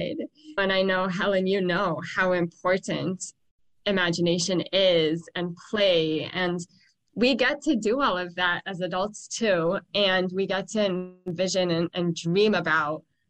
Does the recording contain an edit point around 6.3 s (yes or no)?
no